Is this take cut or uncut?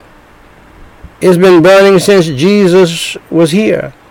cut